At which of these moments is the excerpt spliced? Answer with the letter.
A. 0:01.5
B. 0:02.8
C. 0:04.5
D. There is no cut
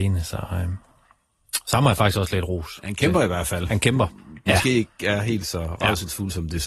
C